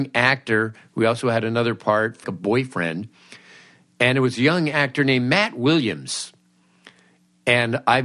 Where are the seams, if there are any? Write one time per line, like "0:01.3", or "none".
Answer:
0:02.2